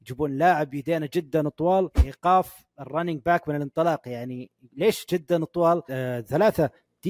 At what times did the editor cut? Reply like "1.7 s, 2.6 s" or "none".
5.9 s